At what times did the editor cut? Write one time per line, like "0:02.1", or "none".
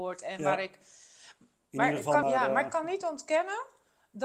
0:02.2